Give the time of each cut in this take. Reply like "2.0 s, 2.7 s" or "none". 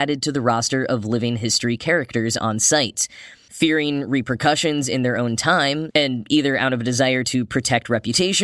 3.5 s, 5.9 s